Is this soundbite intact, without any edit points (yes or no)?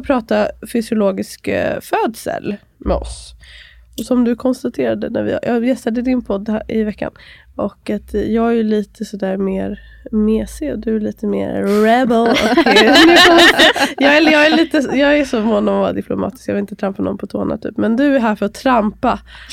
yes